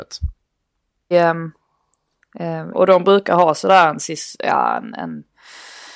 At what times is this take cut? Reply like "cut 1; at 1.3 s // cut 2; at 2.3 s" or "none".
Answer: cut 1; at 1.1 s // cut 2; at 2.7 s